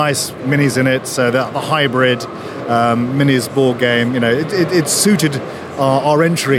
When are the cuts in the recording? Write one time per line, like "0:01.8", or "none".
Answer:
none